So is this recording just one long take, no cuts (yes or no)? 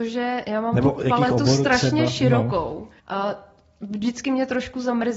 no